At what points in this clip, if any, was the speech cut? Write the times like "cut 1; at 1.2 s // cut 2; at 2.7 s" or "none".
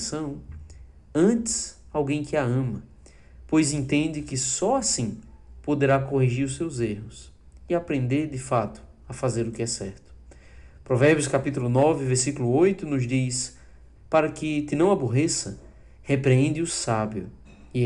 cut 1; at 13.9 s